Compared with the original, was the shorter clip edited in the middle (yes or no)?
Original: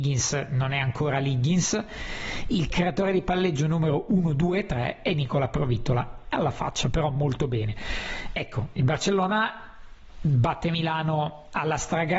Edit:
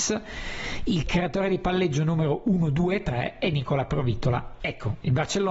yes